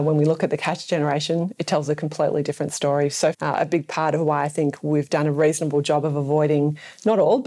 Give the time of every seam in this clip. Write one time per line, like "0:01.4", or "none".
0:03.3